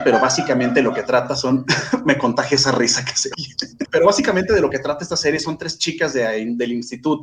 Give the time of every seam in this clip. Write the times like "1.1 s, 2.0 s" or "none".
3.9 s